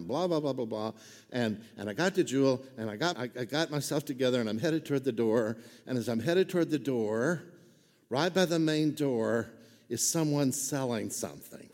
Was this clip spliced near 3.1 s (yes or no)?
yes